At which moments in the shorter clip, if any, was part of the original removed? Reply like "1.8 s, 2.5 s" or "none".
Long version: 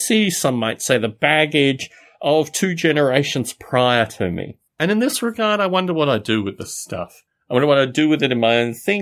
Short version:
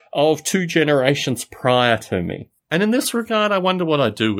none